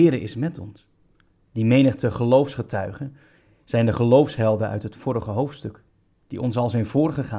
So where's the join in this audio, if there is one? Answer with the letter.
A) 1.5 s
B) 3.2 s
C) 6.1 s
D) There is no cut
A